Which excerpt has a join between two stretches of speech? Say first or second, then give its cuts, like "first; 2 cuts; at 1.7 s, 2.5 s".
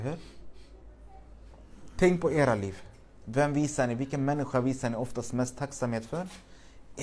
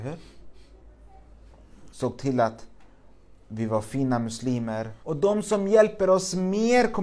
second; 2 cuts; at 1.9 s, 5.0 s